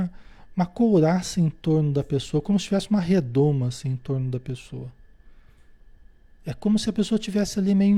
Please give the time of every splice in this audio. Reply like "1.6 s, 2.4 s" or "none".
none